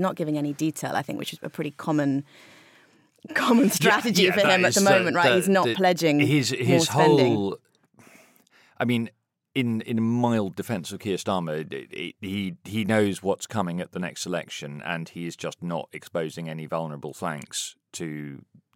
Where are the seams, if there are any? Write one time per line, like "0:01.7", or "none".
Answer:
none

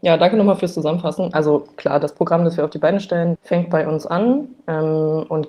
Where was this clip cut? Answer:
0:03.4

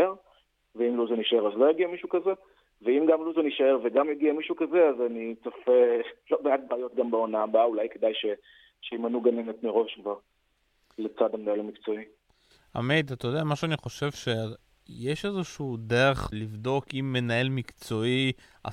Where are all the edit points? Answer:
0:16.3

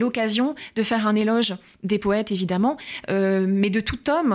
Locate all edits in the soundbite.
none

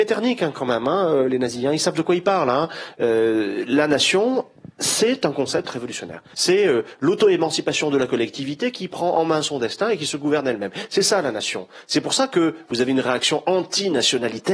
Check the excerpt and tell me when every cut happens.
0:06.3

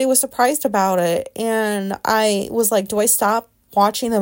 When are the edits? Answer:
none

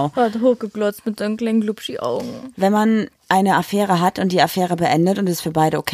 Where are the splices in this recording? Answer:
0:03.2

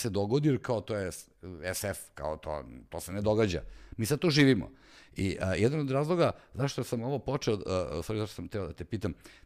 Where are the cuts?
none

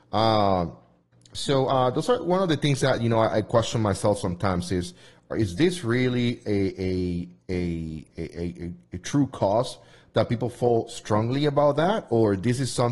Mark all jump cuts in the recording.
none

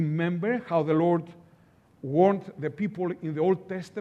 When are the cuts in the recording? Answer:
none

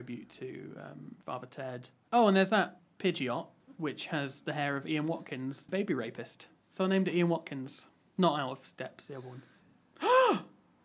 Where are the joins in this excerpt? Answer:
0:02.1

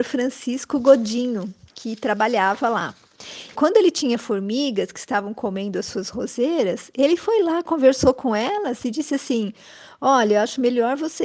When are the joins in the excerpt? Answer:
0:03.5

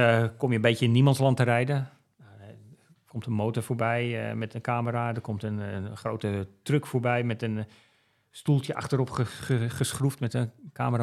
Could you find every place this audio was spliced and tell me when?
none

